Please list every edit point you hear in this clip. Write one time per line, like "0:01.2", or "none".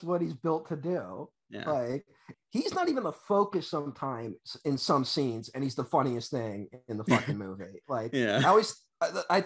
0:02.3